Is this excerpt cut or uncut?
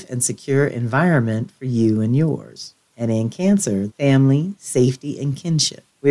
cut